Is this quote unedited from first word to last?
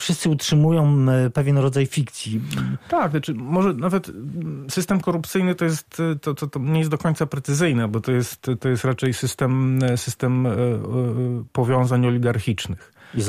yes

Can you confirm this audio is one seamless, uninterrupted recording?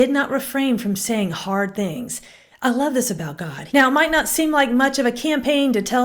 no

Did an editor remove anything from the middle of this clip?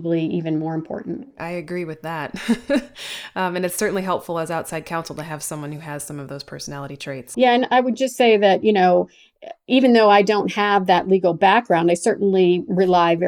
yes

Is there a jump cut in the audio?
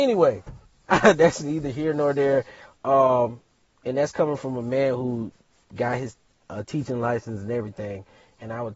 no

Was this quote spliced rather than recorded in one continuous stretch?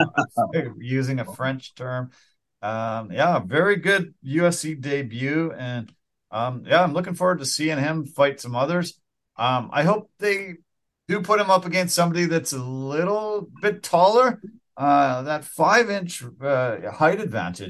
no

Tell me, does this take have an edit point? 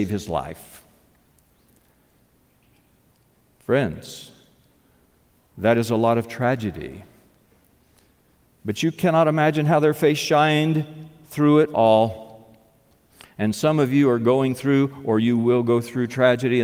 no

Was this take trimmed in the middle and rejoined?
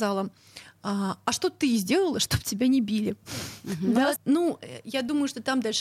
yes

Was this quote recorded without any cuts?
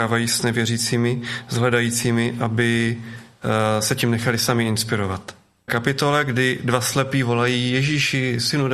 no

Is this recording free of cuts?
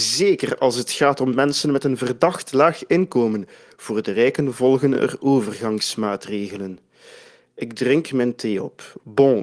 yes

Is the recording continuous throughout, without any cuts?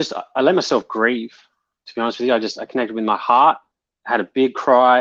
yes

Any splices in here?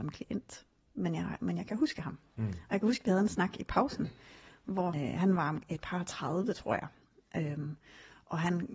yes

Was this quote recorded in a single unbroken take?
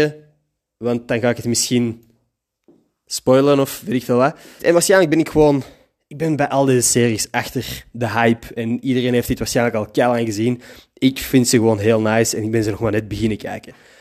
no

